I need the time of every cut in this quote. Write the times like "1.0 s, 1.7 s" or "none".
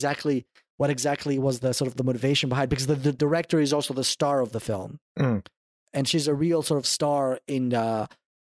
none